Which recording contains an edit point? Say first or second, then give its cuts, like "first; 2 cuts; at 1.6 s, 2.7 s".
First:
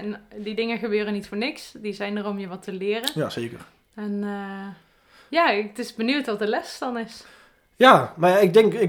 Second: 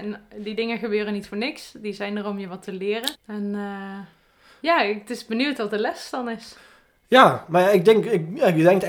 second; 1 cut; at 3.1 s